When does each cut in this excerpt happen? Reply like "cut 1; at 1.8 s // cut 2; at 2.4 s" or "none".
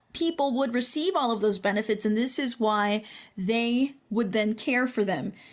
none